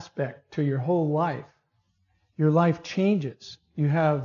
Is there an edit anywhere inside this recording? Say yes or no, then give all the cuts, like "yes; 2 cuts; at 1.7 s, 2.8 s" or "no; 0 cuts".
no; 0 cuts